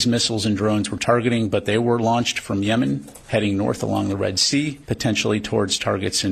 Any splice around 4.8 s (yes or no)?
yes